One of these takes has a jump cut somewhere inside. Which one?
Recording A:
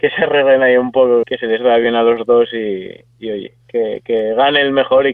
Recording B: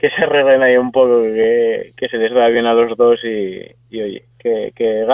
A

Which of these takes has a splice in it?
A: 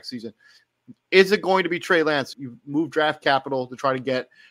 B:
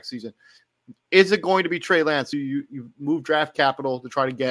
A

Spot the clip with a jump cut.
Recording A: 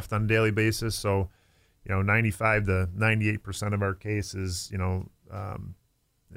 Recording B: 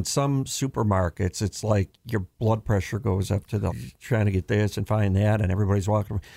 B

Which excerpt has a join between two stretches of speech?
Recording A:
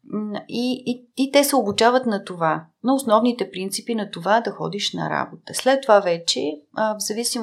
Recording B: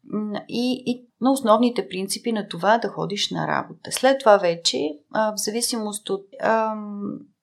B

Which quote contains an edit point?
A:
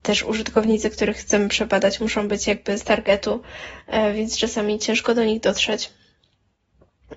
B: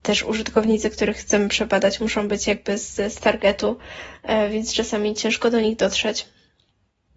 A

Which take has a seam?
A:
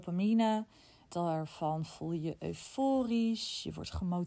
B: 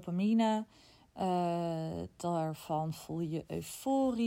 A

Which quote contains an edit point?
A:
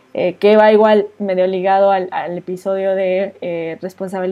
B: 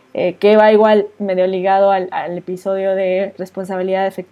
B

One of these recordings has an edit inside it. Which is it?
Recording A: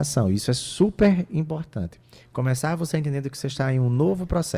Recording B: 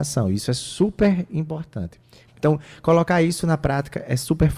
B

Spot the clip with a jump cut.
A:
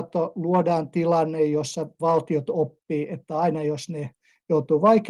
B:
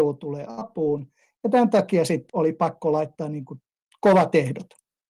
B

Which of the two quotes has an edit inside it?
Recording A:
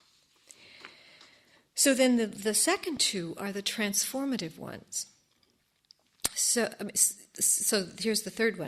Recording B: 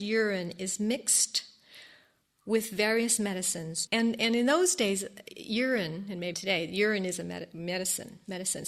B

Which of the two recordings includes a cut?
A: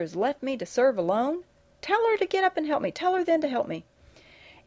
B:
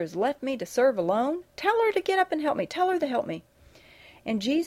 B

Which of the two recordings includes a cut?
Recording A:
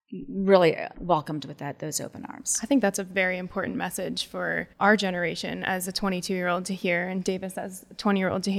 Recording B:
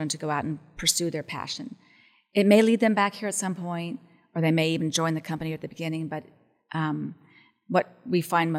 A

